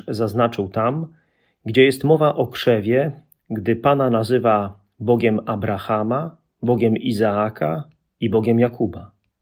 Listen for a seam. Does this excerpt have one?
no; 0 cuts

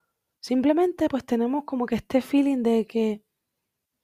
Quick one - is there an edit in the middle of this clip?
no; 0 cuts

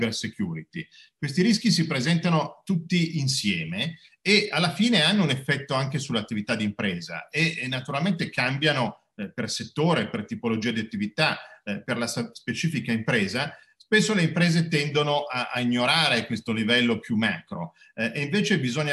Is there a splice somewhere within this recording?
no; 0 cuts

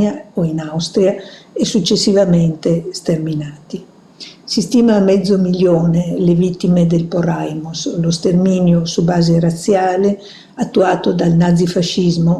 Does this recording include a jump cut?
no; 0 cuts

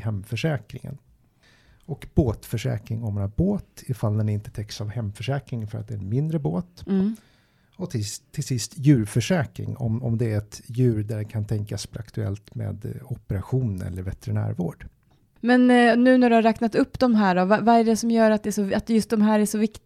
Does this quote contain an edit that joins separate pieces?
no; 0 cuts

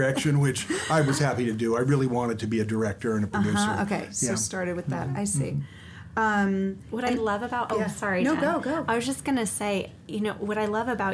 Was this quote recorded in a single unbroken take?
yes; 0 cuts

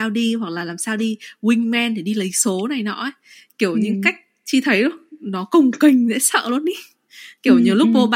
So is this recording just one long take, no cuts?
yes; 0 cuts

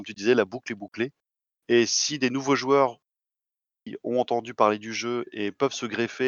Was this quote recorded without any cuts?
no; 1 cut; at 1.5 s

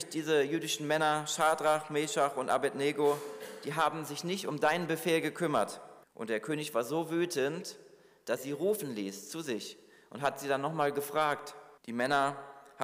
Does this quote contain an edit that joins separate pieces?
yes; 3 cuts; at 6.0 s, 8.4 s, 11.8 s

